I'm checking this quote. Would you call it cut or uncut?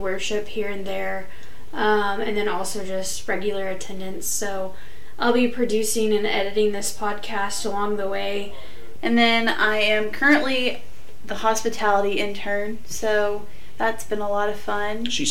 cut